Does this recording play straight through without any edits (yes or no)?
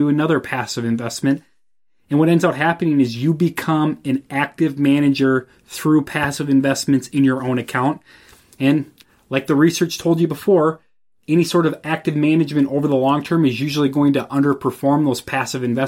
yes